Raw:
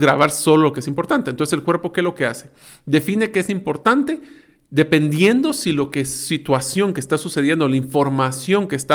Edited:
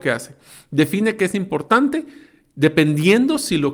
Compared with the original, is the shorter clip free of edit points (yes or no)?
yes